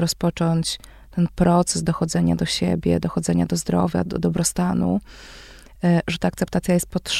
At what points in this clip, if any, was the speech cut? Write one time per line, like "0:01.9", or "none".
0:04.1